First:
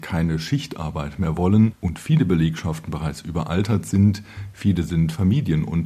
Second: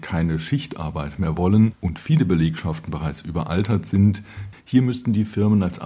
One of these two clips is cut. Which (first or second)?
second